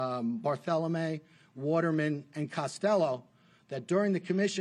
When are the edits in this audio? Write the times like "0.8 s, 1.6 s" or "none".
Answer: none